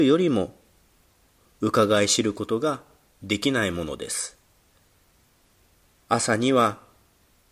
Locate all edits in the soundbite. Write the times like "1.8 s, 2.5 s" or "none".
none